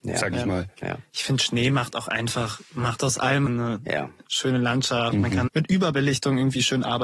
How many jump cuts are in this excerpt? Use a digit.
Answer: 2